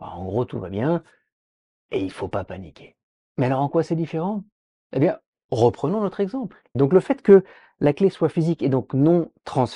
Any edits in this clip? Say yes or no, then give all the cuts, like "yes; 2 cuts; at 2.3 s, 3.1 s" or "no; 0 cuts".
yes; 2 cuts; at 3.3 s, 6.7 s